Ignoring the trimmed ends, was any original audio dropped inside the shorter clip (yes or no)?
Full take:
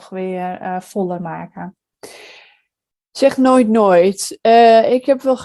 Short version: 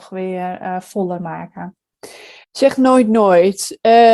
yes